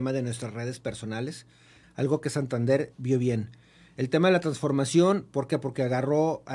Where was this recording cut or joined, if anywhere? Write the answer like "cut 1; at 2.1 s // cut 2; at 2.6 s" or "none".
cut 1; at 1.8 s